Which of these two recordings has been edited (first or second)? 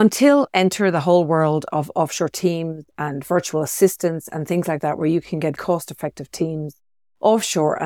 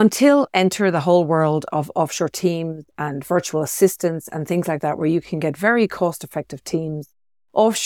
first